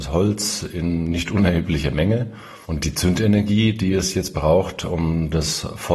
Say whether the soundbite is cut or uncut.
cut